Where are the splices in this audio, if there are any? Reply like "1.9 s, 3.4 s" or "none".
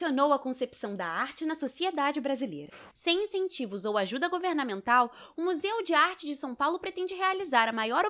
2.9 s

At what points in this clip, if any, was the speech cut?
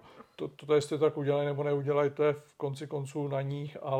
none

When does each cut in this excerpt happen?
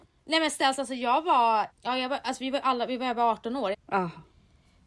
1.7 s, 3.7 s

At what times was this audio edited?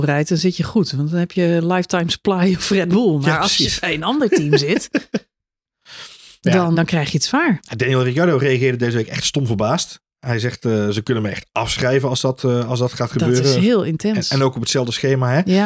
6.7 s

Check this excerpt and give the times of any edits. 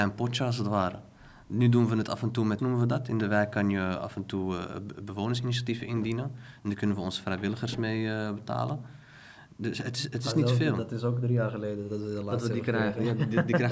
2.6 s

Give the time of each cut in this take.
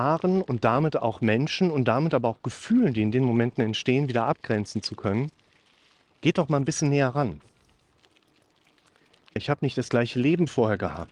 6.0 s, 9.4 s

